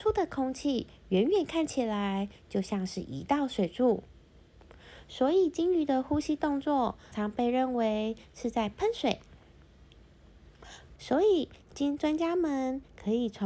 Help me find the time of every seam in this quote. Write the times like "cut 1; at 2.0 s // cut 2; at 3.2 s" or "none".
cut 1; at 7.1 s // cut 2; at 11.0 s